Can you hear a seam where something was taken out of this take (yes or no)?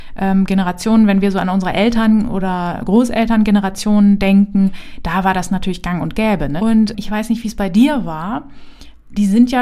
yes